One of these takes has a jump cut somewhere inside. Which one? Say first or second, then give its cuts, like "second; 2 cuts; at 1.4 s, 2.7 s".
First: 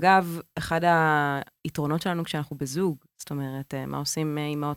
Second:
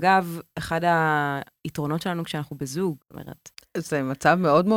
second; 1 cut; at 3.0 s